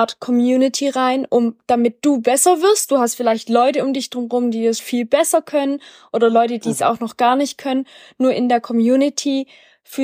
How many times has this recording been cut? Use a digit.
1